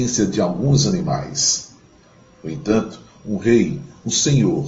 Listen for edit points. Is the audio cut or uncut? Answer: uncut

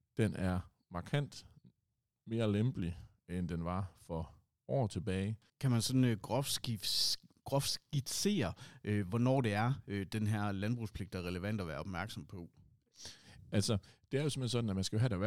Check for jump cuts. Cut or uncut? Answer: cut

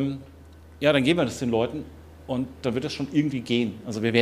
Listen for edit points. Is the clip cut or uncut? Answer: uncut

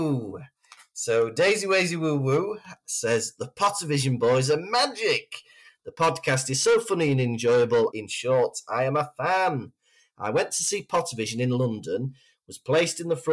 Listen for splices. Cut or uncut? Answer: cut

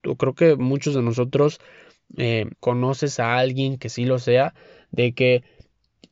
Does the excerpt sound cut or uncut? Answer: cut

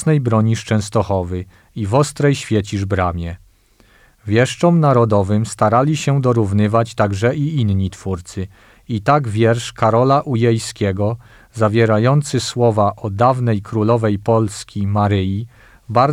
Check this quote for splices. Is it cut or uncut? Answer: uncut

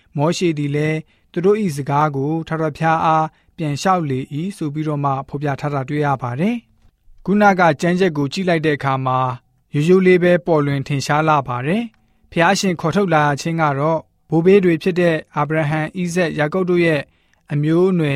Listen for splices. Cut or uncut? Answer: uncut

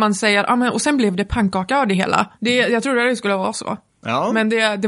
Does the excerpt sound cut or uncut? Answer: cut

